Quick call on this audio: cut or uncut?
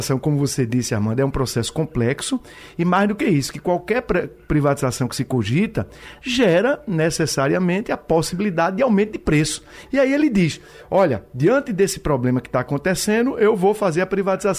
cut